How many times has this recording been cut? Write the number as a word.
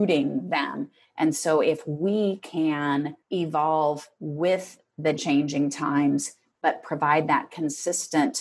one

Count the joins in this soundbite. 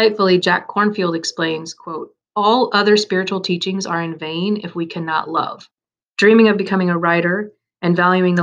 one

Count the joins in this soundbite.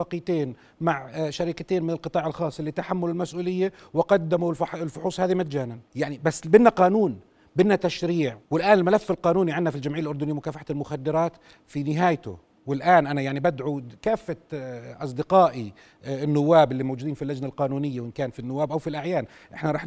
two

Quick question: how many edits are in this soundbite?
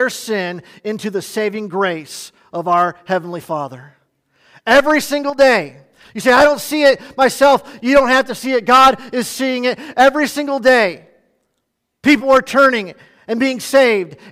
zero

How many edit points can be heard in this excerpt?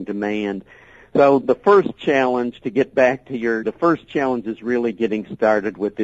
two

